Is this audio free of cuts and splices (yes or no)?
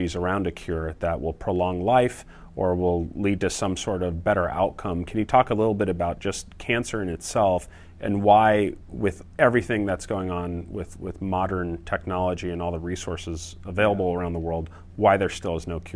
yes